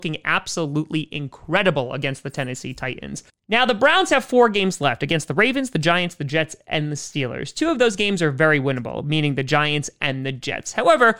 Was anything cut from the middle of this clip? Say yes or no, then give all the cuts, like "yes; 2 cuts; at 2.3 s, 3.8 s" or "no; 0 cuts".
no; 0 cuts